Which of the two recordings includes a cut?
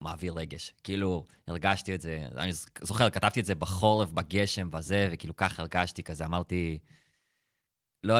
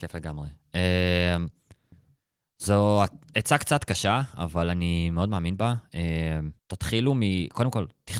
second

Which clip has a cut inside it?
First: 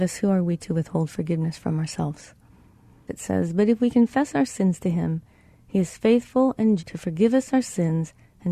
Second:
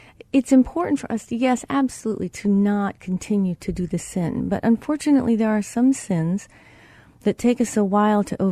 first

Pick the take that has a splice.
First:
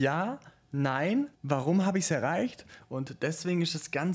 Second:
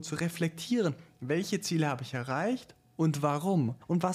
first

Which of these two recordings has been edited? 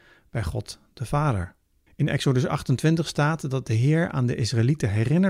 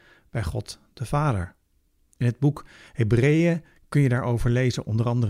first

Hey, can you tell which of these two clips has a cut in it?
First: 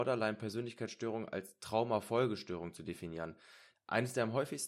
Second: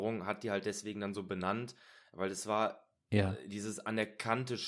first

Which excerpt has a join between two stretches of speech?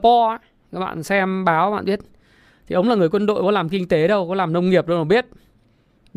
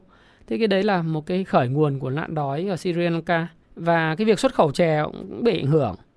second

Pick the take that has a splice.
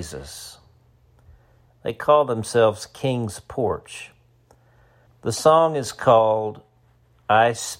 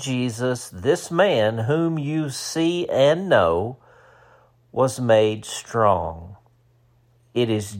first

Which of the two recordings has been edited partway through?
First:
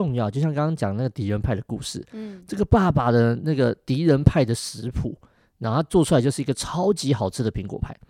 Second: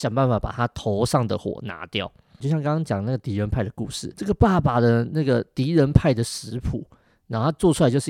second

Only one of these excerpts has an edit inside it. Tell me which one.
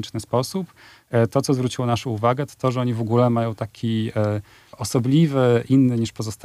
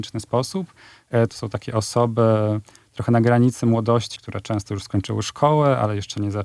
second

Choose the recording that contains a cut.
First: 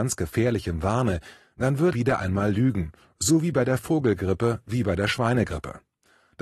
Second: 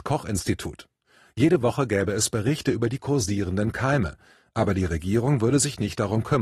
first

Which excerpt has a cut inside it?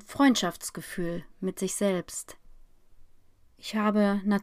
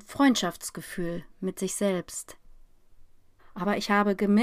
second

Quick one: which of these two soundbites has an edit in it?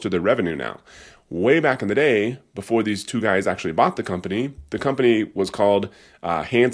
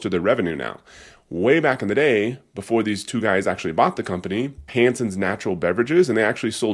second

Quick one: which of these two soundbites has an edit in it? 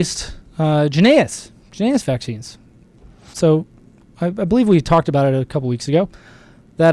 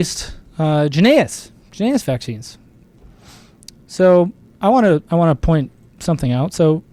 first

